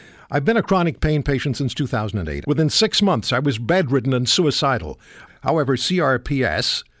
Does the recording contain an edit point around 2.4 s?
yes; 2 cuts; at 2.4 s, 5.3 s

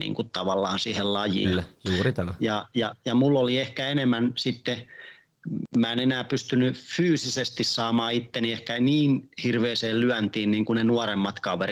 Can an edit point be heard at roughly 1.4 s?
yes; 1 cut; at 1.4 s

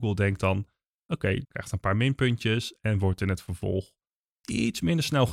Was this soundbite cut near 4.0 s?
no; 1 cut; at 1.4 s

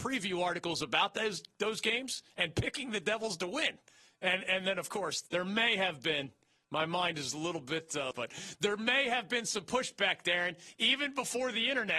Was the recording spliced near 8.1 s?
yes; 2 cuts; at 5.3 s, 8.1 s

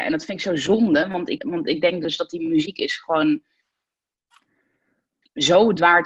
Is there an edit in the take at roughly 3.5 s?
no; 1 cut; at 1.4 s

